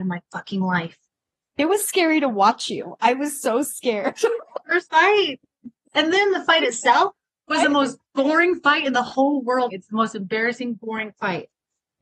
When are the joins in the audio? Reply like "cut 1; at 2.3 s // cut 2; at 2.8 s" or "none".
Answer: cut 1; at 9.7 s